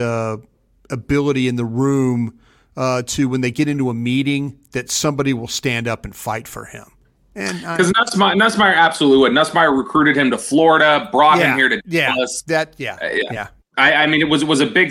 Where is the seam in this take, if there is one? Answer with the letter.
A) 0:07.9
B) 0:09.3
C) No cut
C